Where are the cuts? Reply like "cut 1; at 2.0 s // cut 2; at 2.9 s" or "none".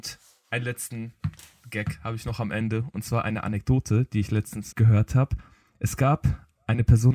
cut 1; at 4.7 s